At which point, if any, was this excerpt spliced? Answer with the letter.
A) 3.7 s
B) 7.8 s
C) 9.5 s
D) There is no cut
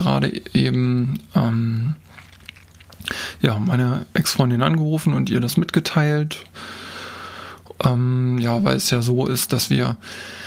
B